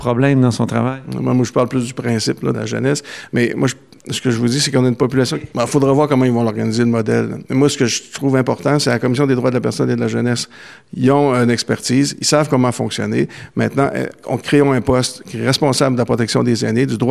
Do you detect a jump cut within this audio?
yes; 2 cuts; at 2.5 s, 5.5 s

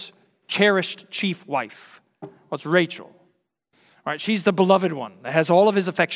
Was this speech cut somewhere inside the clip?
no; 0 cuts

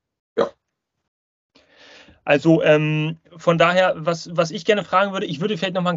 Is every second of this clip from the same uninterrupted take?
yes; 0 cuts

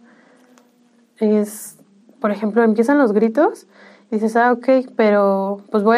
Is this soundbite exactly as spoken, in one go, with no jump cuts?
no; 1 cut; at 2.0 s

